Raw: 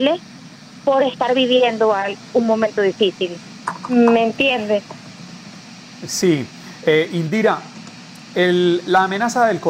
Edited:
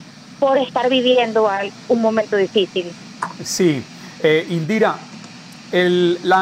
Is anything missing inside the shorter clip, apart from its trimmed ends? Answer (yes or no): yes